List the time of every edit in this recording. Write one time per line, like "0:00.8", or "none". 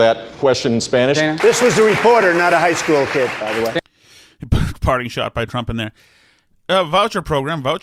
0:01.4